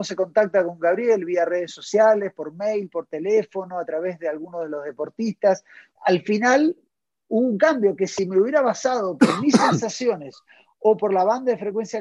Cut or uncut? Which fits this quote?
cut